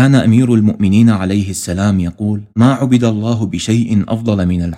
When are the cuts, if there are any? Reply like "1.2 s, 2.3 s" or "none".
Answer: 2.5 s